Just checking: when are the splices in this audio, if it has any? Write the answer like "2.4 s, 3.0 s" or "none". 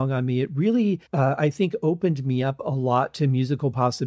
1.1 s